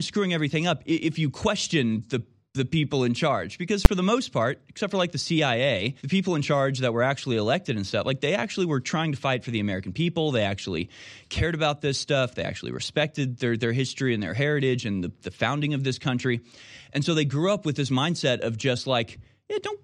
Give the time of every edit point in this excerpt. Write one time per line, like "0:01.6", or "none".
0:06.0